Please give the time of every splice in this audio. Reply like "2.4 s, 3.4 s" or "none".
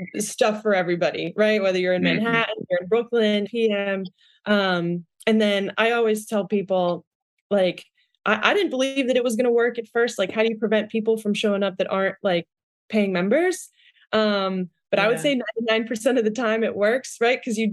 3.5 s